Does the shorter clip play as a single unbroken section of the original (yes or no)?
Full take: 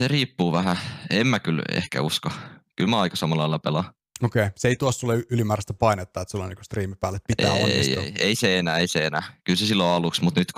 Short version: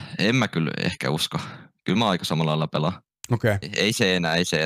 no